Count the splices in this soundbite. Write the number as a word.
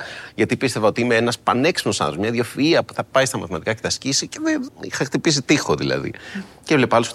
one